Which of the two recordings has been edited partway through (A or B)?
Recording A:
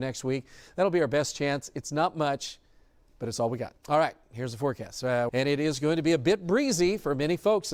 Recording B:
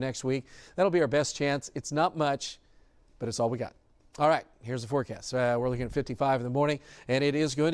A